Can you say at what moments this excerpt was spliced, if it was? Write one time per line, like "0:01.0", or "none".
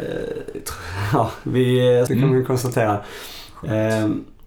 0:02.1